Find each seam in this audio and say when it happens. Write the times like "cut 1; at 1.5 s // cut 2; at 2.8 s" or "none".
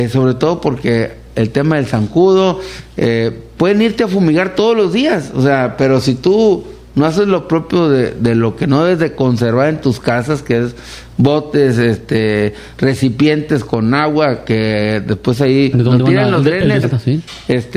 cut 1; at 15.7 s // cut 2; at 16.8 s